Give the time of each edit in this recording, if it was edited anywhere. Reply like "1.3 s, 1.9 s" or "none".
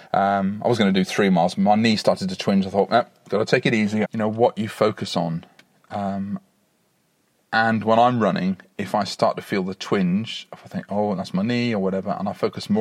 4.0 s